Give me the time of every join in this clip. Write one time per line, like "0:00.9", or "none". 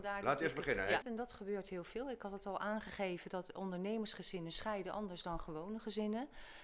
0:01.0

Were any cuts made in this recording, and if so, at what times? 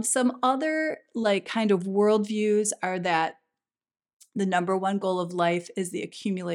none

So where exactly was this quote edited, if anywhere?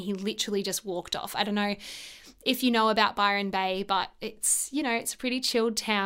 none

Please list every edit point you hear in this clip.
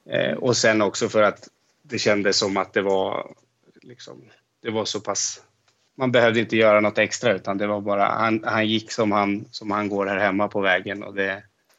0:05.9

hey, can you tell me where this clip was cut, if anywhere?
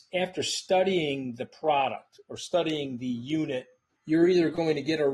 0:03.9

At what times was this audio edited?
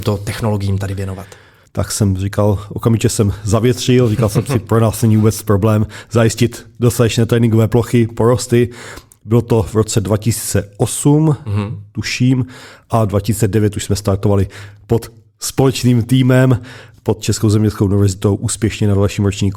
0:01.6

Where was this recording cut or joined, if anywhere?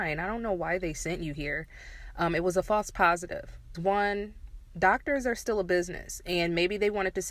0:03.7

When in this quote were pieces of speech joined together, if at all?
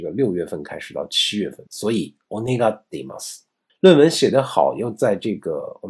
0:01.7
0:03.7

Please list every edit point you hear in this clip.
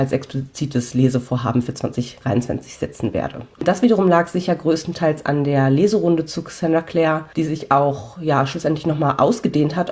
0:03.6

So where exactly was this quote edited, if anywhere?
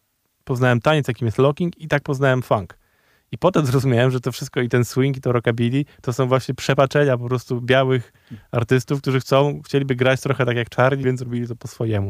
0:11.0

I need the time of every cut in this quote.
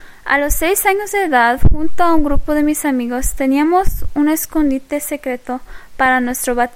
none

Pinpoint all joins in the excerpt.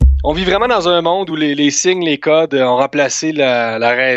none

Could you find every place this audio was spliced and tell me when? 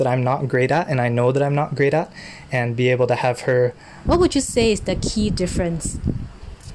0:04.1

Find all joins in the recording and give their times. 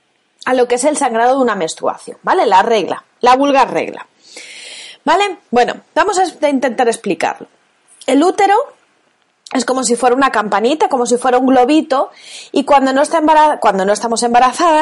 none

